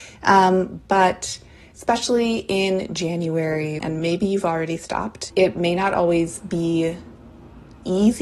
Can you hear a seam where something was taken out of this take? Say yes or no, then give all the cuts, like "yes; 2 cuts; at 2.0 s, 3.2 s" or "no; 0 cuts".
yes; 2 cuts; at 3.8 s, 5.3 s